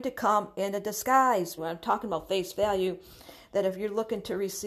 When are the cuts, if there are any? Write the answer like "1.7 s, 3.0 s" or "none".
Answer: 1.6 s